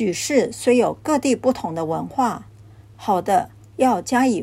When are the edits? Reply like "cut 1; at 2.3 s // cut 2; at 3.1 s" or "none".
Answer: cut 1; at 2.9 s